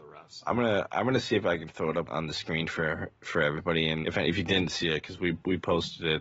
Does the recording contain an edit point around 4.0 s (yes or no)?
yes